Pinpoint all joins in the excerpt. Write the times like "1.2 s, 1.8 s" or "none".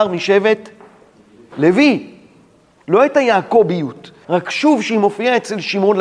2.8 s, 4.2 s